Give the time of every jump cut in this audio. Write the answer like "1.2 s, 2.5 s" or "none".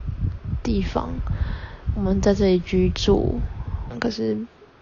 3.9 s